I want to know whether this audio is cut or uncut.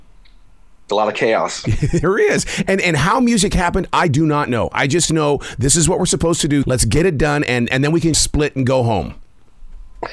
cut